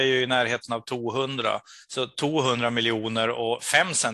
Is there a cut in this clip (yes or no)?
yes